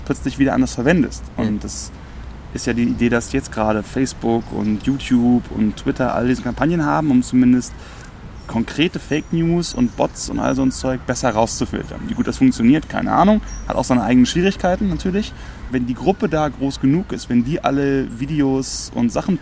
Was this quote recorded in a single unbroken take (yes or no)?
no